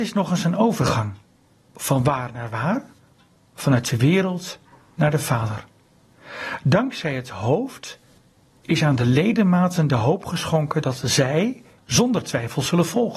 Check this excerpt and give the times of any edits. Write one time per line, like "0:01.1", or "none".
0:11.8